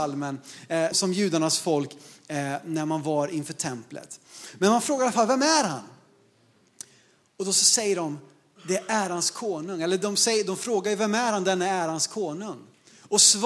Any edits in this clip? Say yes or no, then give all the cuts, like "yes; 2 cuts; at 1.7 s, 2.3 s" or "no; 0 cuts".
yes; 1 cut; at 0.9 s